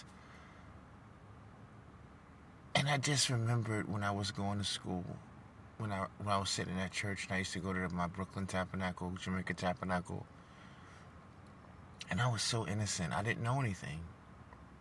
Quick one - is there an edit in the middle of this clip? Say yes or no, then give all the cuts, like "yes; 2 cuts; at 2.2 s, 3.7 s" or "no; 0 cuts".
yes; 1 cut; at 6.1 s